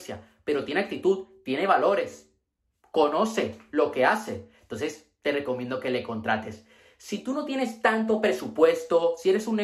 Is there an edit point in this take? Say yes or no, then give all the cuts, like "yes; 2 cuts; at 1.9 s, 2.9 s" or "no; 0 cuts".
no; 0 cuts